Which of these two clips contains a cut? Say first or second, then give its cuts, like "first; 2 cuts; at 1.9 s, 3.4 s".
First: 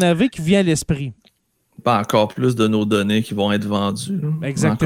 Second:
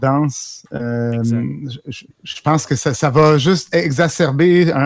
second; 1 cut; at 2.1 s